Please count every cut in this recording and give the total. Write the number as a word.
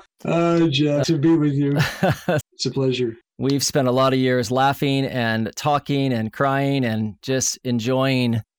two